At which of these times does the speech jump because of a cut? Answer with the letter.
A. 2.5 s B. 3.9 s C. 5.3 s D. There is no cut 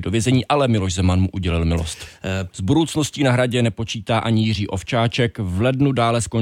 A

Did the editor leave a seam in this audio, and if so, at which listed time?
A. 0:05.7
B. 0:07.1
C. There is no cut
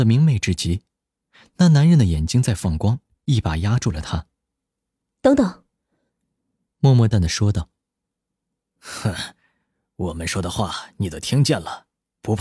B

